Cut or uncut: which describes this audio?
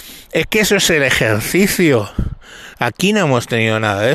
cut